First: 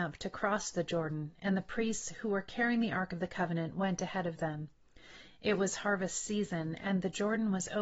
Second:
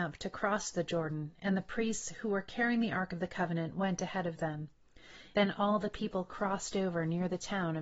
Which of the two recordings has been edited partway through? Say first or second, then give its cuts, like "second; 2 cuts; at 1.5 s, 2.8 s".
second; 1 cut; at 5.3 s